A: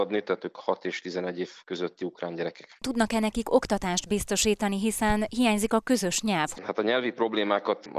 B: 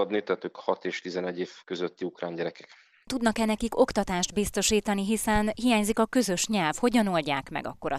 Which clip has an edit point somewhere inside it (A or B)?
A